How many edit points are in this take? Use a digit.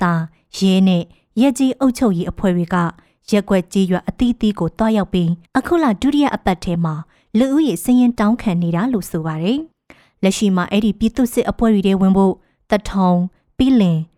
2